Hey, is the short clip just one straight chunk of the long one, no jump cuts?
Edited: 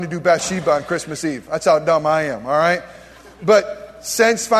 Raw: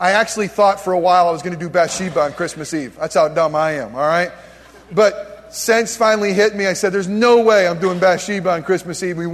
yes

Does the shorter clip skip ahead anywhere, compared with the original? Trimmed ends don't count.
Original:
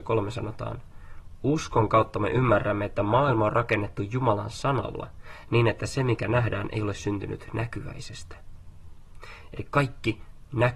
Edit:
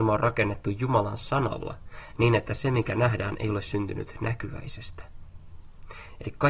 no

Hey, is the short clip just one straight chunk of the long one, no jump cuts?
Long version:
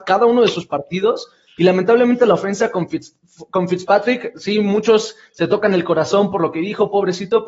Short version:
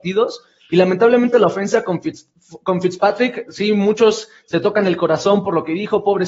yes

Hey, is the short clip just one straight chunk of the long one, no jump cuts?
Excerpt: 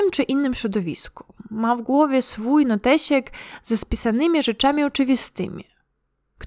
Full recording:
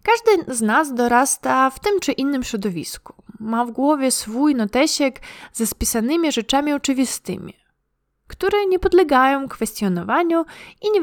yes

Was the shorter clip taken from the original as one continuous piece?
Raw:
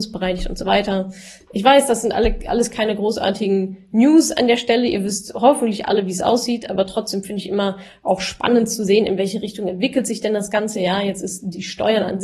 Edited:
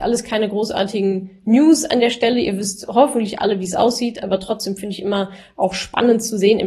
yes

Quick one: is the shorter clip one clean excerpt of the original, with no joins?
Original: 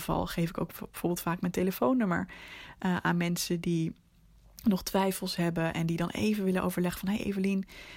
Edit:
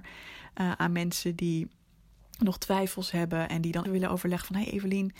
no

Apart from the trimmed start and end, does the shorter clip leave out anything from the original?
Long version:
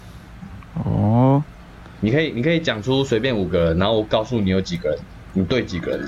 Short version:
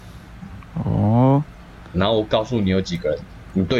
yes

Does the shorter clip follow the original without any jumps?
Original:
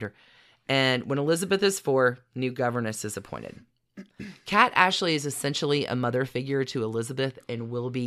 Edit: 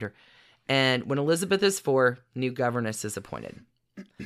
yes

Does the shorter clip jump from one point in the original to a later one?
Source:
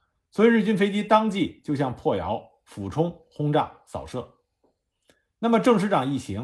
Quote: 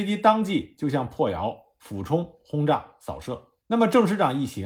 yes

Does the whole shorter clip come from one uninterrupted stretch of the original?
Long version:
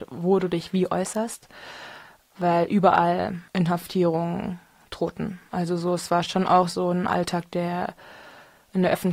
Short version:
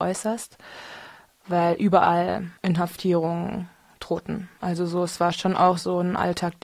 yes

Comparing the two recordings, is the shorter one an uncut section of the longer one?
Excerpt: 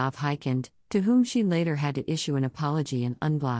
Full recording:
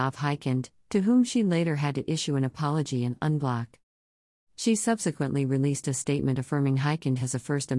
yes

